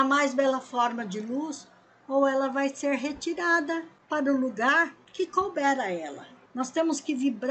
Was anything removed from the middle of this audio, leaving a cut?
yes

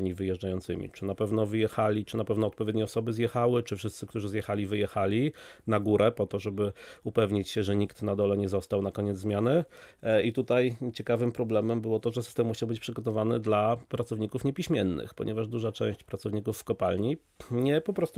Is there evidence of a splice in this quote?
no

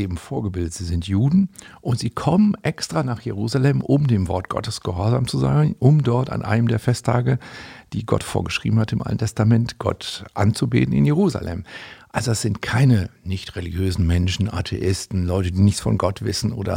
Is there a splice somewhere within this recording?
no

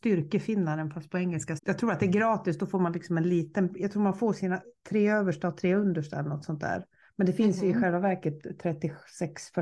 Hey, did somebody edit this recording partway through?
yes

